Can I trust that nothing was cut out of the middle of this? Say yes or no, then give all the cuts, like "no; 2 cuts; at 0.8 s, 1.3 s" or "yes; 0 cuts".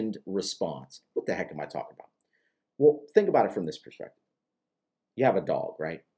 yes; 0 cuts